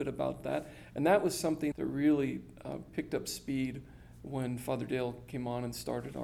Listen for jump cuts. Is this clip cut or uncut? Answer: cut